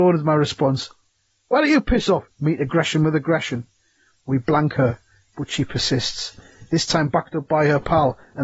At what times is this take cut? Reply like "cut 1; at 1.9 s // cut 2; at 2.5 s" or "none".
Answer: cut 1; at 2.3 s // cut 2; at 4.1 s